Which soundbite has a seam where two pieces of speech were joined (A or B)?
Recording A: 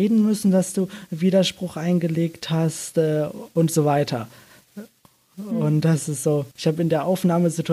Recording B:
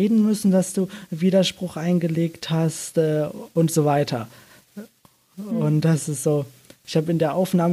A